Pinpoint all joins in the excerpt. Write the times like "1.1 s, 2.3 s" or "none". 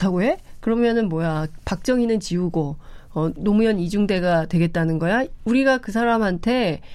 none